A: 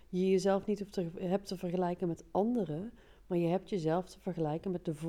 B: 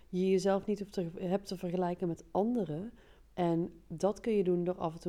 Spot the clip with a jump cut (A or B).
B